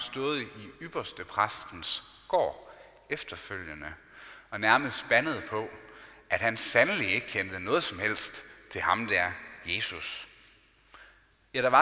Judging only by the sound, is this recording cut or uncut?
uncut